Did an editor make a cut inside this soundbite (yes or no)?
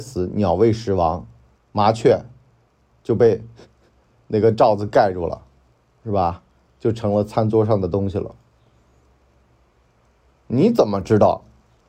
yes